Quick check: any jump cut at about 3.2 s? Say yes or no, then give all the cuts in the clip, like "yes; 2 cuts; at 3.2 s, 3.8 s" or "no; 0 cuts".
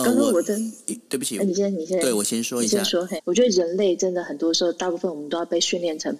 yes; 1 cut; at 3.2 s